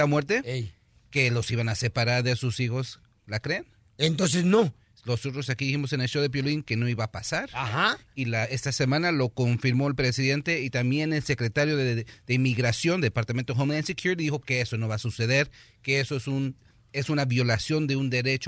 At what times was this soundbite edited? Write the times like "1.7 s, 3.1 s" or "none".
none